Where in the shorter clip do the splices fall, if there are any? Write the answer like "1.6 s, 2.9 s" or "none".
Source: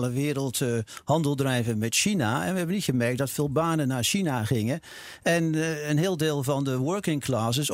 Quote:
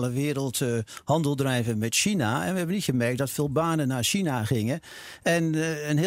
none